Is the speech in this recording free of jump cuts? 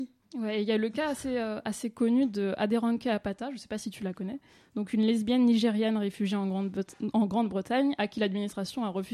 yes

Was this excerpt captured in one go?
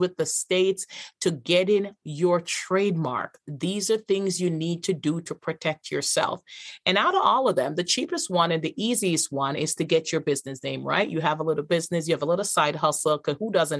yes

